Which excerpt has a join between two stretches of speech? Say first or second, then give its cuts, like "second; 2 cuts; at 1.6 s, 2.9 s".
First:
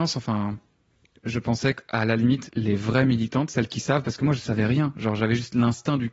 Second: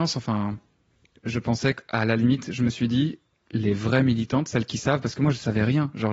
first; 1 cut; at 2.5 s